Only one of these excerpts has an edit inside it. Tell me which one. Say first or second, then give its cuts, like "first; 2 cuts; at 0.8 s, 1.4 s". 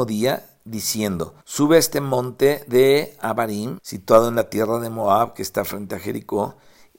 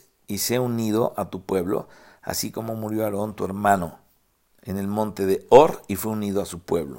first; 2 cuts; at 1.4 s, 3.8 s